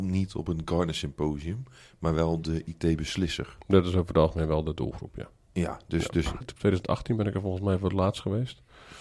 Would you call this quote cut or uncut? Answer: cut